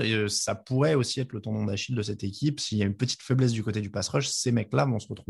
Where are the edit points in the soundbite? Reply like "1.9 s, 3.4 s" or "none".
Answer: none